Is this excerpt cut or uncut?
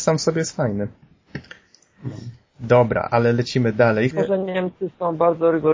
cut